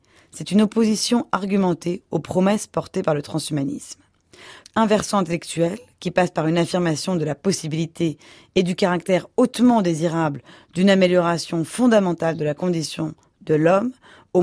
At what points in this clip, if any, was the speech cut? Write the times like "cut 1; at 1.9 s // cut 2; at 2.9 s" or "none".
cut 1; at 4.6 s